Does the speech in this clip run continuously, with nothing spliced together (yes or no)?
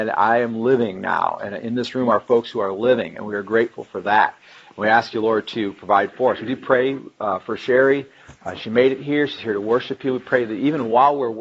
yes